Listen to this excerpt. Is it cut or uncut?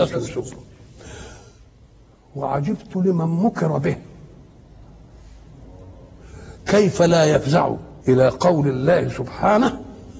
cut